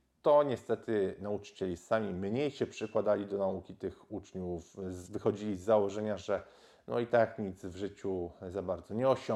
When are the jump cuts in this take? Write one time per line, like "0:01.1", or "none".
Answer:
none